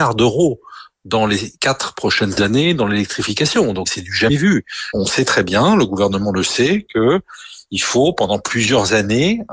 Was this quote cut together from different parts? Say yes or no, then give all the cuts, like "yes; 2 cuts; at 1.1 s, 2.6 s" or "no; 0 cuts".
no; 0 cuts